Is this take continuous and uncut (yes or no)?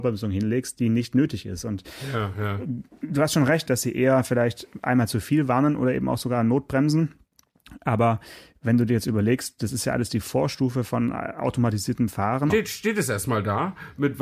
no